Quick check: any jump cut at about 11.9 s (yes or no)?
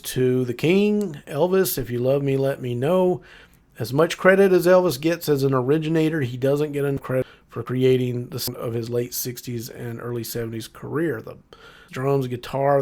yes